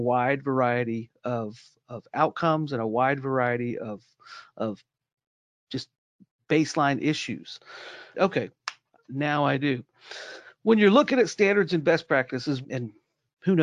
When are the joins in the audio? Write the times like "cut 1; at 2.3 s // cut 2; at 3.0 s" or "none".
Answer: cut 1; at 8.1 s // cut 2; at 12.6 s